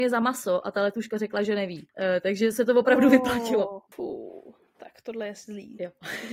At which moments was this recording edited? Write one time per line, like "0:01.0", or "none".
none